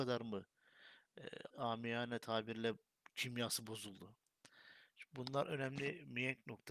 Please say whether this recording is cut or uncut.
cut